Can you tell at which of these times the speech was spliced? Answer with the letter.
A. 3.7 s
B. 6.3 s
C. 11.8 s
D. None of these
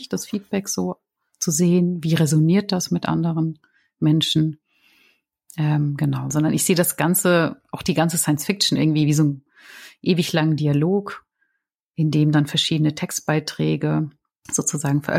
B